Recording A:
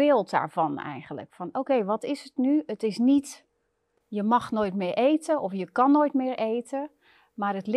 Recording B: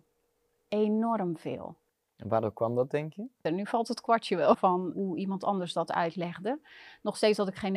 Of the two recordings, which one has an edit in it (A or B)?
B